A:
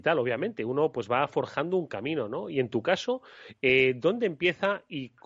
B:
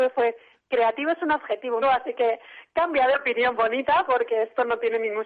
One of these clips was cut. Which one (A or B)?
B